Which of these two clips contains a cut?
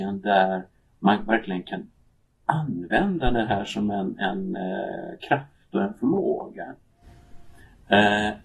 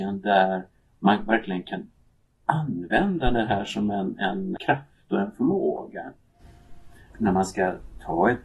second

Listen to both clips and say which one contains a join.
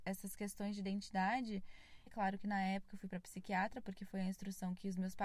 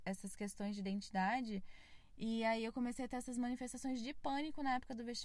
first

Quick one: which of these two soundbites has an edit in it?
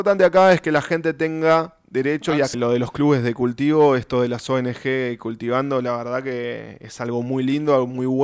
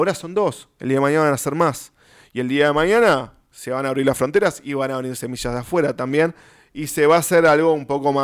first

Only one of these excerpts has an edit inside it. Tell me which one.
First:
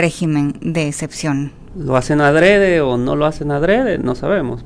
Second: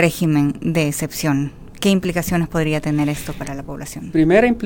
first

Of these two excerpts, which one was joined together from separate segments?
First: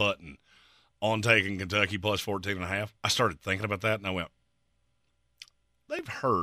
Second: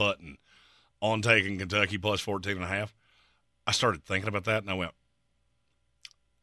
first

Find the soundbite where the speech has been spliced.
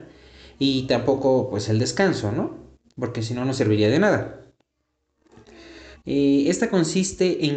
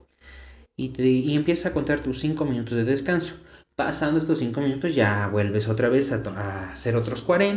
first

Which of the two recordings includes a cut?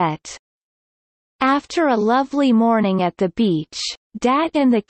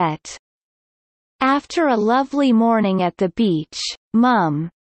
first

